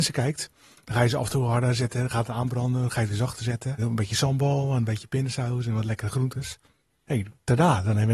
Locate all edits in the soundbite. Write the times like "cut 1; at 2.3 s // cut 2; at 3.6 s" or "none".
cut 1; at 3.8 s